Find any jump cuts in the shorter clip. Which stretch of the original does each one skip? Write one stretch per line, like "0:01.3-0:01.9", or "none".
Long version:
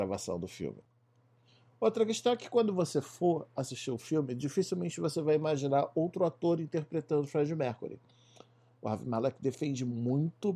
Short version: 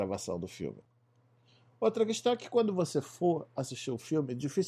none